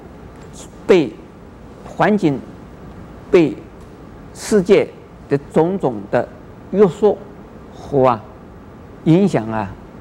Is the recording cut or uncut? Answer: cut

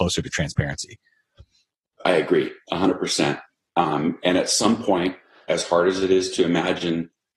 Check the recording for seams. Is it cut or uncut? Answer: uncut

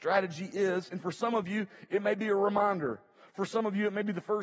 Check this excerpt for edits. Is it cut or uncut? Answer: uncut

